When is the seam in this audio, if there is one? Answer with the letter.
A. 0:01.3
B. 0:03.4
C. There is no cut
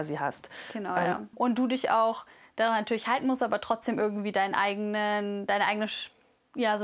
A